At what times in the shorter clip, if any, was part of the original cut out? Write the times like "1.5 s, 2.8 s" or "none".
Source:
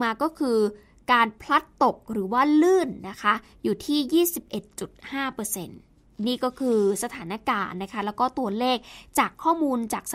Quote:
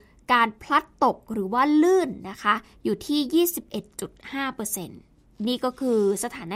none